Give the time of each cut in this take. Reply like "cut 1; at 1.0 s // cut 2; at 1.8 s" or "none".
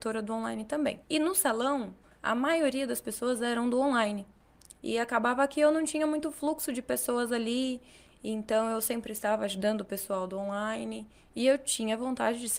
cut 1; at 1.0 s // cut 2; at 4.8 s

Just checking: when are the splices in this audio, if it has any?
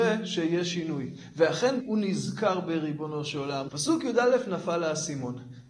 cut 1; at 1.8 s // cut 2; at 3.7 s

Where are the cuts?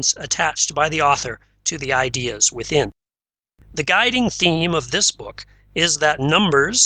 none

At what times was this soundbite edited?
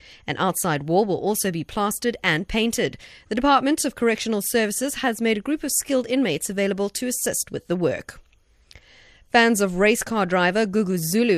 none

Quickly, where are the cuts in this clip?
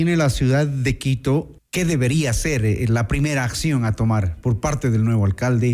cut 1; at 1.6 s

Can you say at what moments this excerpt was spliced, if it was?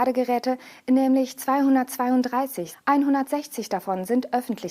cut 1; at 2.7 s

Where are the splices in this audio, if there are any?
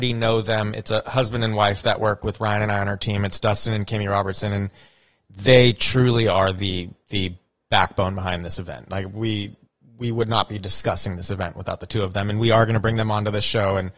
none

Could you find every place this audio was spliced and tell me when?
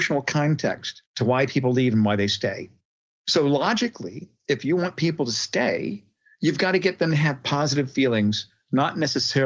cut 1; at 1.1 s

